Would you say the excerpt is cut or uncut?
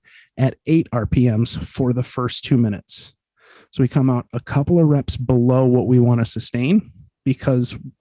uncut